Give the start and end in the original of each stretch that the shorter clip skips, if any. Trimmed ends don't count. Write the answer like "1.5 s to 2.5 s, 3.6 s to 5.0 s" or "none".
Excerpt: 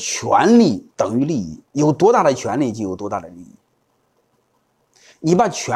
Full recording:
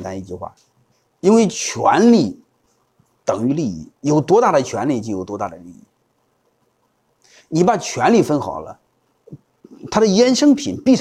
2.5 s to 3.2 s